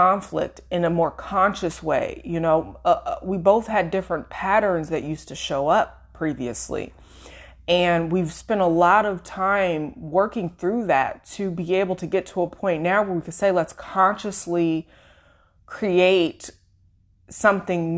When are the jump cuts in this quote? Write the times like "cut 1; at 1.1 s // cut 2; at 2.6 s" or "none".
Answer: none